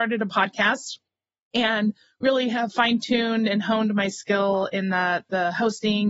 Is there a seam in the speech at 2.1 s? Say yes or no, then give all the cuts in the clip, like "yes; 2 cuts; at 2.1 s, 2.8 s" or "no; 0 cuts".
no; 0 cuts